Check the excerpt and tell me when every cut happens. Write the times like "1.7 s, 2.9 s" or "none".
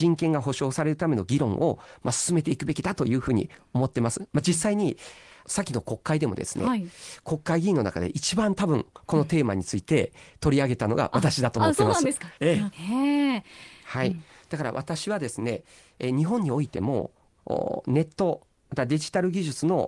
12.4 s, 13.8 s